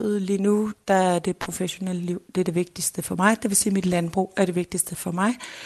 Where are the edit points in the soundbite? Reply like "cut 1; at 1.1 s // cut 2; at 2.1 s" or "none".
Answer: none

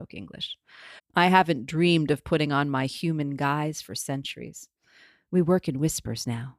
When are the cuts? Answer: cut 1; at 1.0 s

